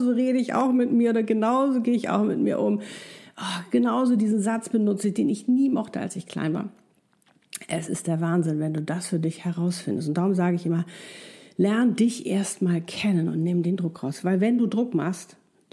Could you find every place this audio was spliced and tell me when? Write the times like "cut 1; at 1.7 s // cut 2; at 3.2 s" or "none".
none